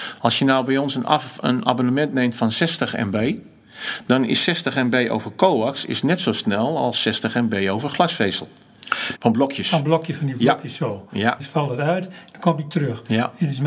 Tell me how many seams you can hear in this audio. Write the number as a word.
two